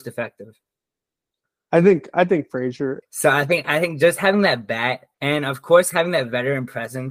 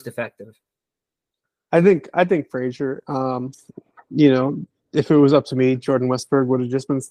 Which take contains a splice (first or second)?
first